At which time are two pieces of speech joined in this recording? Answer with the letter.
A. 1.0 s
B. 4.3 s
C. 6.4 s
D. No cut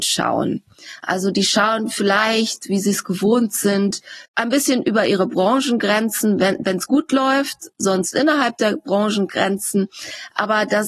B